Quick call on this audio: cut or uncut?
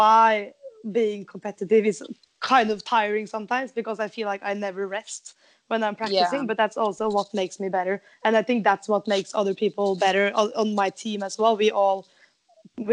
uncut